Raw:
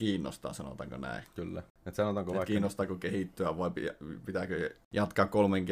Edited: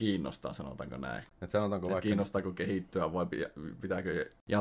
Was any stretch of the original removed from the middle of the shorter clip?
yes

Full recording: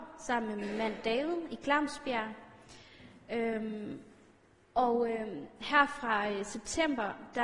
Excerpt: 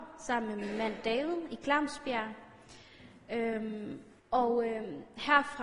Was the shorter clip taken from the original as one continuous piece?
no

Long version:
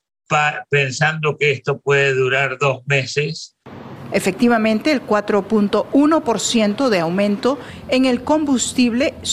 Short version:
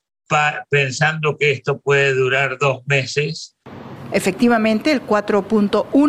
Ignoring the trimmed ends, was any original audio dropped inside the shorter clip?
no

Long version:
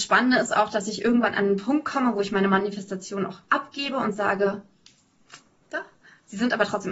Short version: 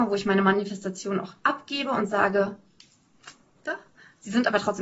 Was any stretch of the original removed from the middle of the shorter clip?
no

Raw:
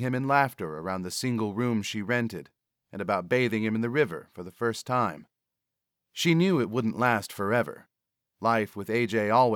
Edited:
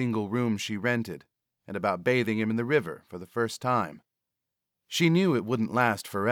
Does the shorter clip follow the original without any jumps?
yes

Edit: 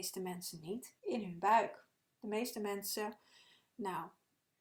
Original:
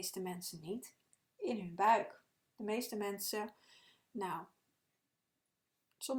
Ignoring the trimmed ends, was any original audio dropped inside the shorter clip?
yes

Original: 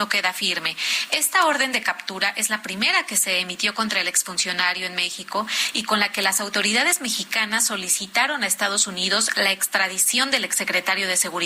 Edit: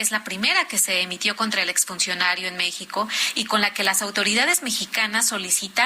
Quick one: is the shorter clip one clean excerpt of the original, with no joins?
yes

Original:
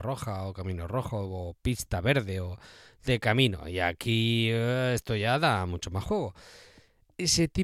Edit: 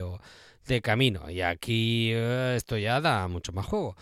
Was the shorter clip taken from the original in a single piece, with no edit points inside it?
yes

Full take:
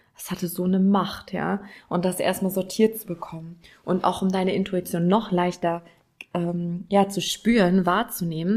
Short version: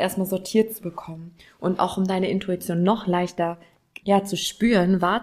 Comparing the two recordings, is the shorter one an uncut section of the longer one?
no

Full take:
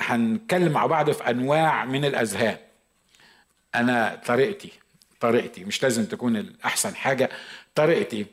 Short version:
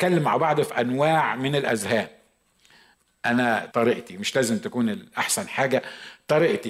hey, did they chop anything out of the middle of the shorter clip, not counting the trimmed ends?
yes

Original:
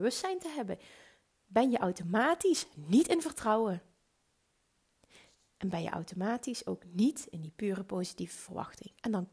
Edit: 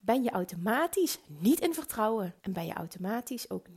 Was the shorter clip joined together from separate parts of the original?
yes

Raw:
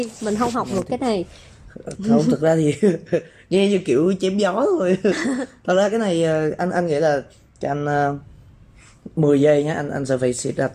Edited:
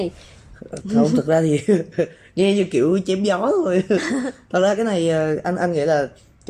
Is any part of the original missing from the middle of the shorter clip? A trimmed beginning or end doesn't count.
no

